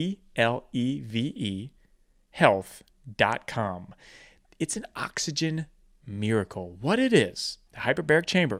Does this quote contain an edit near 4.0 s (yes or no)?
no